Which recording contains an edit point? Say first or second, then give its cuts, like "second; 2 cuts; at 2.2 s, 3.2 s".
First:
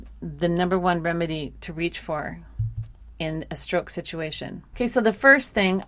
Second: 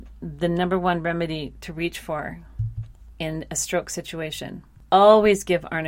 first; 1 cut; at 4.7 s